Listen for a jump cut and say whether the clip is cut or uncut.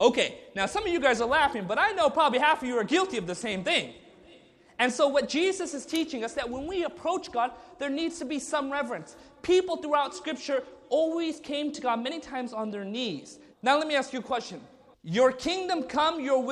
cut